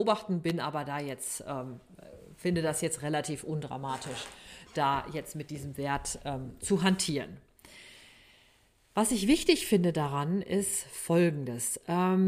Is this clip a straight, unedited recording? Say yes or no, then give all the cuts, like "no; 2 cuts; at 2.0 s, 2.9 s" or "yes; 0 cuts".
yes; 0 cuts